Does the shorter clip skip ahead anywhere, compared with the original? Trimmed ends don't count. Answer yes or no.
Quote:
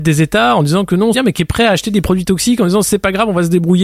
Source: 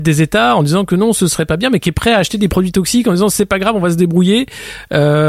yes